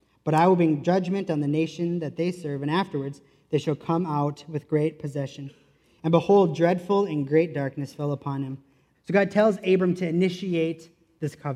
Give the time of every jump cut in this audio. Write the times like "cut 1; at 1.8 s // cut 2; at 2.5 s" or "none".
cut 1; at 6.0 s // cut 2; at 8.9 s